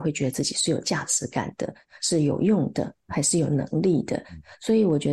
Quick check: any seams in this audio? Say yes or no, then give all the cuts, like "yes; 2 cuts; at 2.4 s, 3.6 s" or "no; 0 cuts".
no; 0 cuts